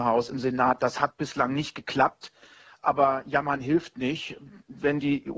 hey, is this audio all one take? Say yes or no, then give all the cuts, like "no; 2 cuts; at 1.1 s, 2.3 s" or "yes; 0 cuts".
yes; 0 cuts